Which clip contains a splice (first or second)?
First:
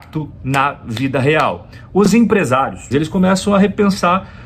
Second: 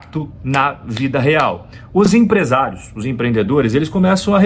first